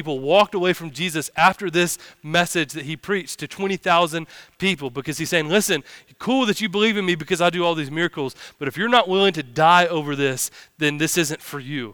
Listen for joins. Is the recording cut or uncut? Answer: uncut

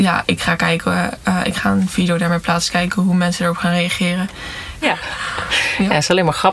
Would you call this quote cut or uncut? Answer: cut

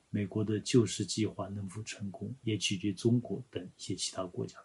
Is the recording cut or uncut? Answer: cut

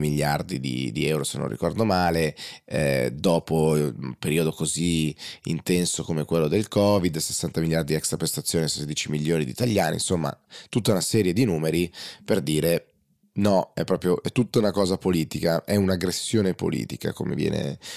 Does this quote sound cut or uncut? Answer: uncut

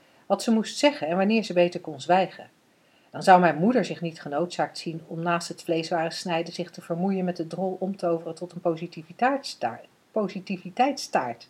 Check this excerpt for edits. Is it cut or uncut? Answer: uncut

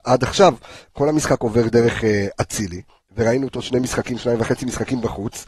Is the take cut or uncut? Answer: uncut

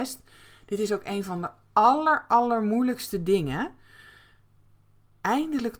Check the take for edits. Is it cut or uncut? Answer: uncut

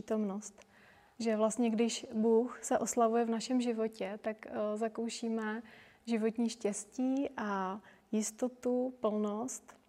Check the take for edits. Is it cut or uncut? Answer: cut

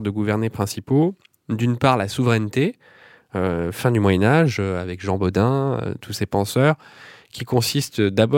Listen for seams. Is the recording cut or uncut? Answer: uncut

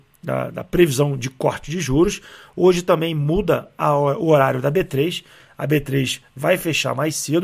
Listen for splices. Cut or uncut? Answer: cut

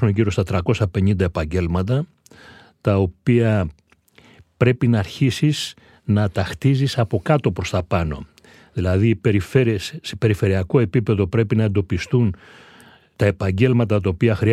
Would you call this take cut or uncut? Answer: uncut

